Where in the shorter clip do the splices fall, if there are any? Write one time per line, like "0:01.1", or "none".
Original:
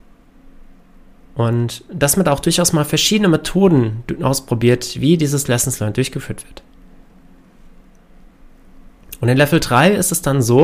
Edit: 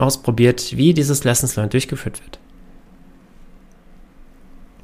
none